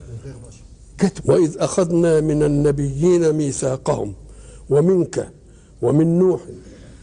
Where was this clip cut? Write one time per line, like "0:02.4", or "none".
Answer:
0:01.2